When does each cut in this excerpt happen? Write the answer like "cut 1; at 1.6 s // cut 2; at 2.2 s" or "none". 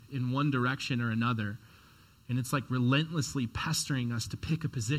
none